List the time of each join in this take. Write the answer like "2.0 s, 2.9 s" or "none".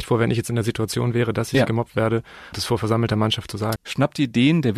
2.5 s, 3.8 s